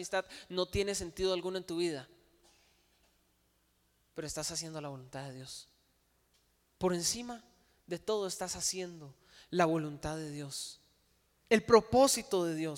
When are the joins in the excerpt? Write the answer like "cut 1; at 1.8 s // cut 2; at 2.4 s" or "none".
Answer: none